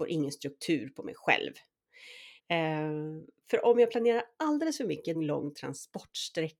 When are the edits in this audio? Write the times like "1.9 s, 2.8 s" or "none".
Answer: 2.4 s, 5.1 s